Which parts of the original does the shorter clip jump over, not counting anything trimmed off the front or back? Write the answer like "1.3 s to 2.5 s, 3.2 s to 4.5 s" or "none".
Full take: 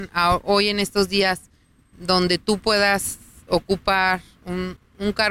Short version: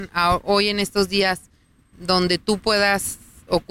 none